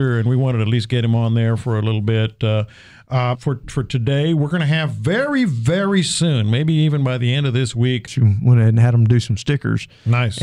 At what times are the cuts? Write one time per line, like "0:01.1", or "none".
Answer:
0:03.3
0:08.1